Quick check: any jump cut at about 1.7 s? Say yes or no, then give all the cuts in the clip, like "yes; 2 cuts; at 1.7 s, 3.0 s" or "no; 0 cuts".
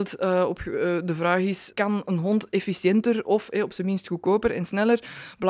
yes; 1 cut; at 1.7 s